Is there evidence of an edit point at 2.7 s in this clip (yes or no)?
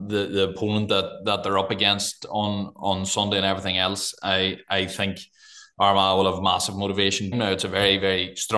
no